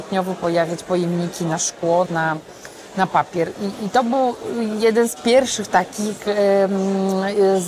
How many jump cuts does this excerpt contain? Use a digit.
1